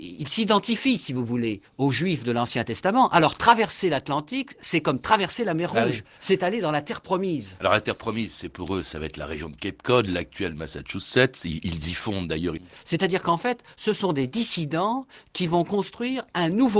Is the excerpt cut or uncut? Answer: cut